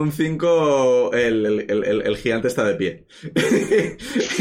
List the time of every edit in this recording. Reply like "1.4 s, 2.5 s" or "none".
none

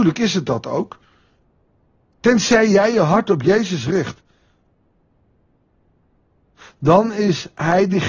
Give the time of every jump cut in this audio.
none

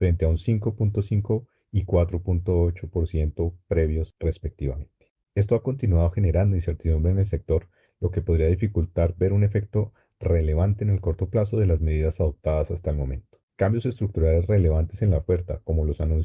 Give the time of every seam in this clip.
5.2 s, 13.5 s

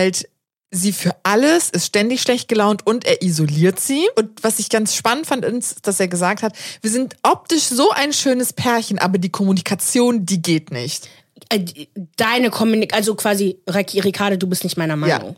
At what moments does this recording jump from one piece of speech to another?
4.1 s

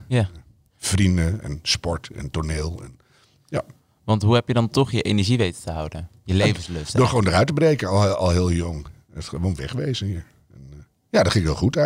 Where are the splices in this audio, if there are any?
none

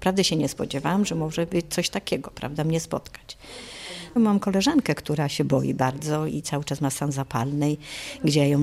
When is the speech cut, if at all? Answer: 6.3 s

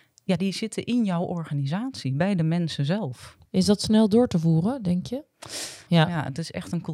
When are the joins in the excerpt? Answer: 3.5 s, 5.9 s

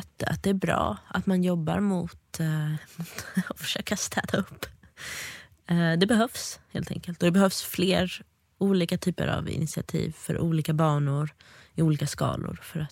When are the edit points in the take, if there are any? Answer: none

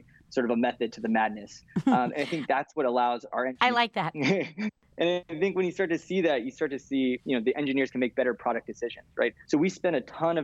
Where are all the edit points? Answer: 9.5 s

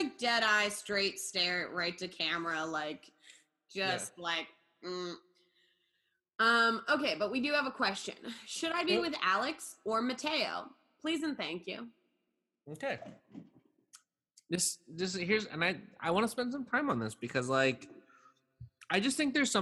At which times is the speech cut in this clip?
none

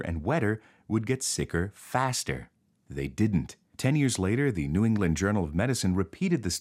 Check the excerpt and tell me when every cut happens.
3.7 s

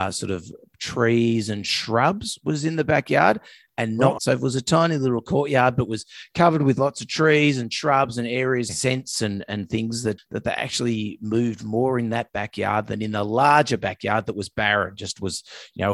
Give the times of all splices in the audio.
4.2 s, 8.7 s, 10.2 s

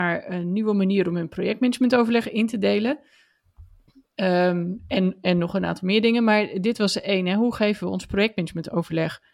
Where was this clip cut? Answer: none

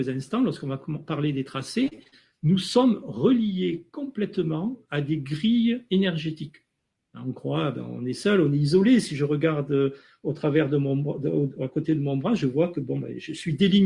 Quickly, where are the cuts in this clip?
6.9 s

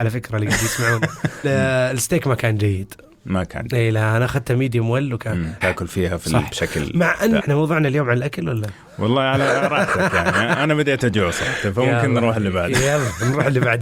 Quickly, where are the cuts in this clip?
1.4 s, 5.6 s, 7.4 s

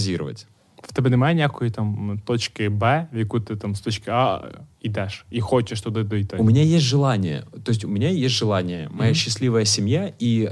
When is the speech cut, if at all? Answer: none

